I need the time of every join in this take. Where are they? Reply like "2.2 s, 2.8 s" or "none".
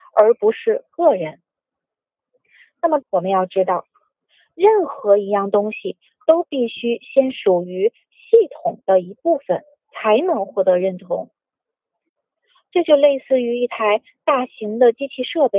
3.0 s